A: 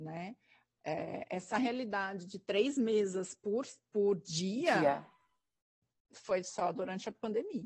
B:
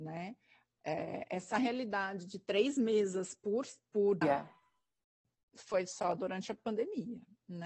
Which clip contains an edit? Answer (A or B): B